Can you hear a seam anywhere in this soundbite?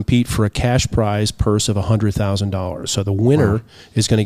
no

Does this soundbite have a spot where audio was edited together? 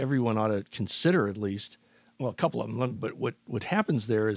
yes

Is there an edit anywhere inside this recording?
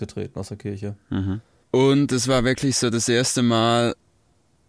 yes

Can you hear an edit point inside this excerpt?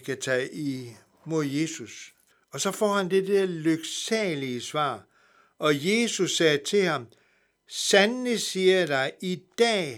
yes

